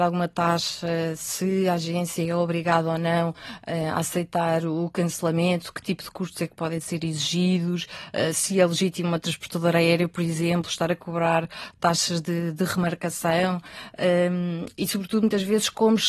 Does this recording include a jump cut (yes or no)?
no